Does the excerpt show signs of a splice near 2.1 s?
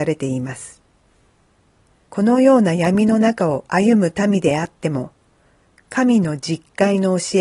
yes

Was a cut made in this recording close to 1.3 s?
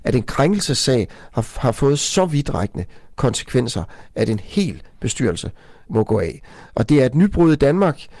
no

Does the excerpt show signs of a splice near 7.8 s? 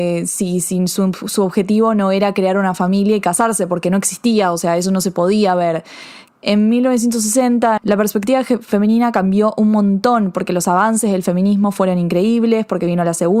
yes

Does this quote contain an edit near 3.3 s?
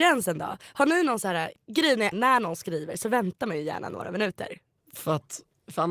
no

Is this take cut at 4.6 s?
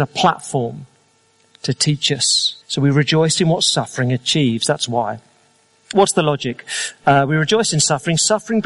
no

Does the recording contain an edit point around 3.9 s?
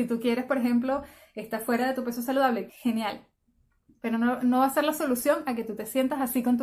no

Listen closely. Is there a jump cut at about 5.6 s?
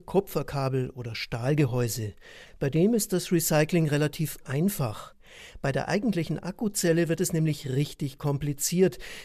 no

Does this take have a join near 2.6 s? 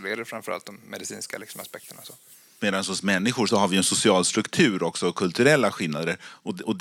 yes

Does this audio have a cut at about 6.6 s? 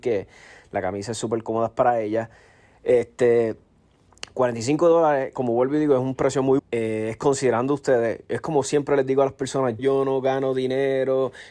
yes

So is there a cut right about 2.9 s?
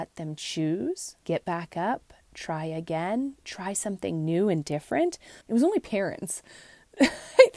no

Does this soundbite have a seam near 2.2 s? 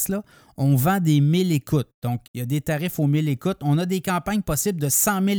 yes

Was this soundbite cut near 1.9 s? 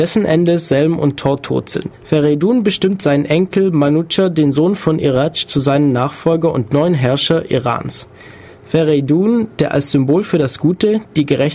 yes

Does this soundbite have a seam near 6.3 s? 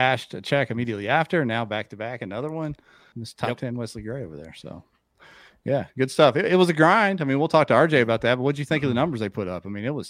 no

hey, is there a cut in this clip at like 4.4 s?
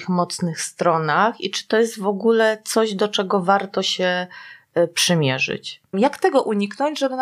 no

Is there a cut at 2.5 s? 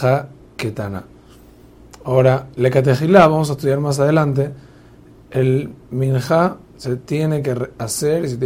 no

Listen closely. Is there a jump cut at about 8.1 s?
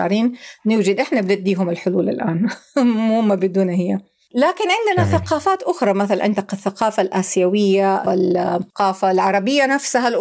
yes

